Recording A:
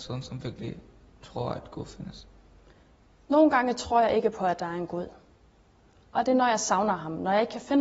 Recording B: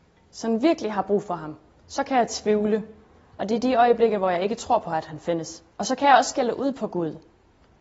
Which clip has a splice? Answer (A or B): B